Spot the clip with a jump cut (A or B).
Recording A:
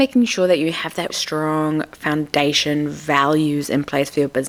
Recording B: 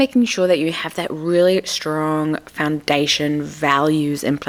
A